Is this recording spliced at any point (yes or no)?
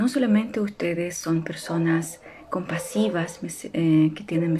no